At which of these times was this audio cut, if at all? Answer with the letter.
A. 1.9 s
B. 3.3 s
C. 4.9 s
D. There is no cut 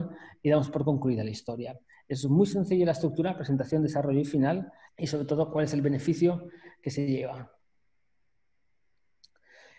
C